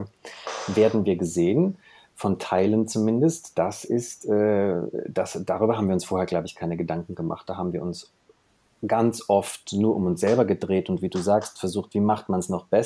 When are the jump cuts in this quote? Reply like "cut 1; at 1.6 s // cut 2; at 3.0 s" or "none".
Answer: none